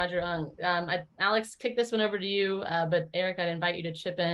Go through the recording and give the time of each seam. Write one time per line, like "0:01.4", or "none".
none